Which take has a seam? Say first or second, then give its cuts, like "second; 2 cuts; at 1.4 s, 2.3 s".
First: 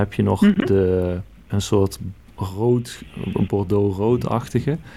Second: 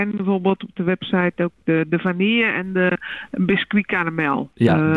first; 2 cuts; at 1.5 s, 3.5 s